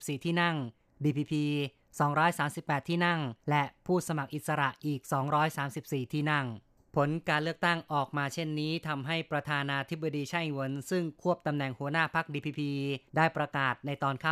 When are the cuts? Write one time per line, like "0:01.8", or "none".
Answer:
0:03.4
0:13.1

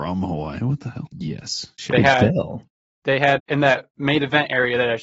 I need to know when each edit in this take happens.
0:01.1
0:03.4

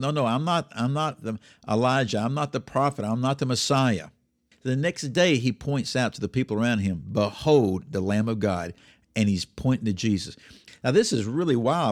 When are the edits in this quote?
0:04.5
0:10.7

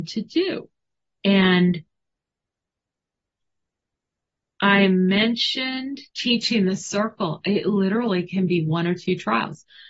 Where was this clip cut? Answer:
0:01.1
0:06.1

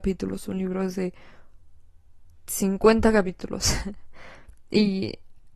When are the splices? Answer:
none

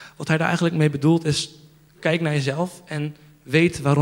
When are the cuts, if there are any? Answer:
0:01.9

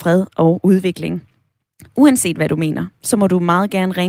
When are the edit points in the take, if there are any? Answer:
none

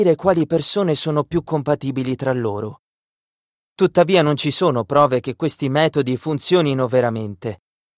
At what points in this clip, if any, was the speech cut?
none

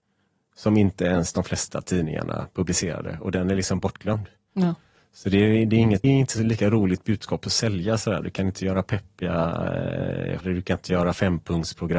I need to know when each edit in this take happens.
0:06.0
0:10.4

